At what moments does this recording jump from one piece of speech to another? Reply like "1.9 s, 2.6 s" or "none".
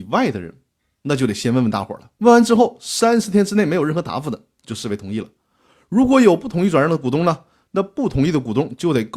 2.2 s